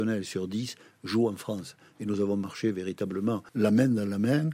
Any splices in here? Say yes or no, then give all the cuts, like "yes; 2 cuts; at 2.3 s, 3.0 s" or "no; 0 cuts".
yes; 1 cut; at 1.9 s